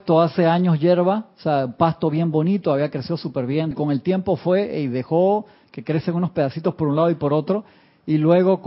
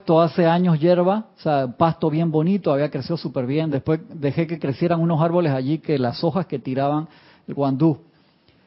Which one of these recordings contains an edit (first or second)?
first